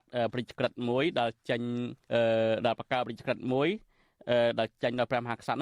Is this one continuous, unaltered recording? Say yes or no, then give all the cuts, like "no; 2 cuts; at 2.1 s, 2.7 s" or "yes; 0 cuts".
no; 1 cut; at 2.0 s